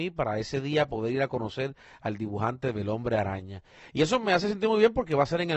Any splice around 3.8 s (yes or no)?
no